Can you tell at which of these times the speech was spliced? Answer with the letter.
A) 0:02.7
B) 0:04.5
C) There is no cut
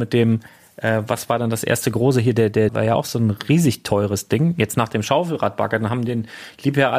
A